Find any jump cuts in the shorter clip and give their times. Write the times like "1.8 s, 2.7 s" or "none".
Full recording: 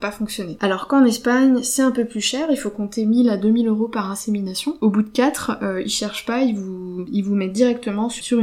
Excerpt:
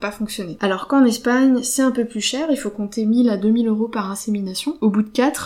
none